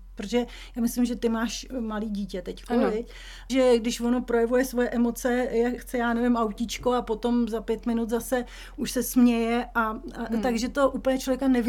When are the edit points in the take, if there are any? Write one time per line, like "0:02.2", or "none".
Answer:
0:03.5
0:05.8